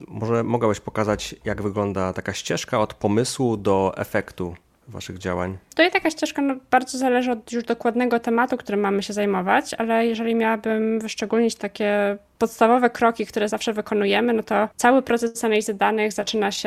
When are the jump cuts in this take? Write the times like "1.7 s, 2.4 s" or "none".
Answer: 13.5 s, 14.7 s